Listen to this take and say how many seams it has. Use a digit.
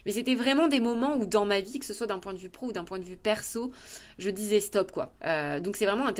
1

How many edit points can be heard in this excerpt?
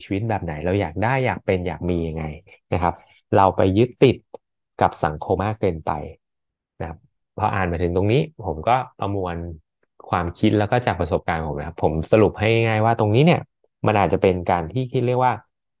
1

